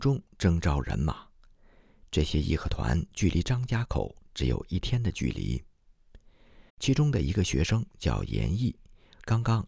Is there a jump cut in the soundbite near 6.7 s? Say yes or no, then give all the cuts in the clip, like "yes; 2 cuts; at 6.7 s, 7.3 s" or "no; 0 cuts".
yes; 1 cut; at 6.7 s